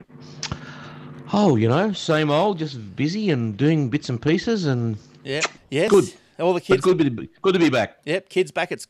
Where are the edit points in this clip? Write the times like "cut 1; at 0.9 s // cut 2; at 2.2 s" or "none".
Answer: cut 1; at 5.6 s